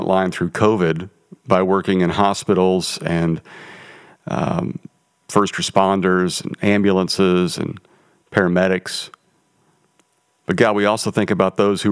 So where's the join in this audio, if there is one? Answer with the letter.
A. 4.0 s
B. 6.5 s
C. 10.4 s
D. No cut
D